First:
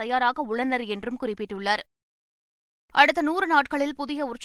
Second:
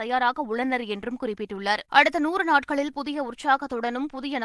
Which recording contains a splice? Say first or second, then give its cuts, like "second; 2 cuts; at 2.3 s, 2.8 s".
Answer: second; 1 cut; at 1.9 s